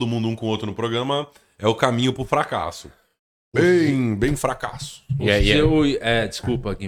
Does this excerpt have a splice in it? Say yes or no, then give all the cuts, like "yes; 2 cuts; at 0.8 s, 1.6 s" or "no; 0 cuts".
no; 0 cuts